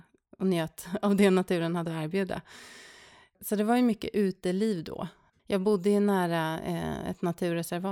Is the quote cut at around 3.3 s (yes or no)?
no